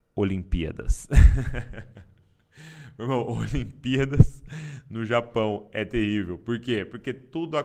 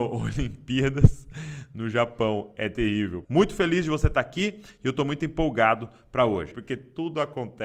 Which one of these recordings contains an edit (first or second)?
second